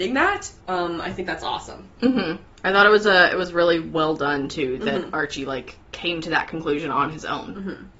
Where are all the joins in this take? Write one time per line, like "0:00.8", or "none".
none